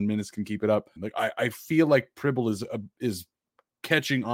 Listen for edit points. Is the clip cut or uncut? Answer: cut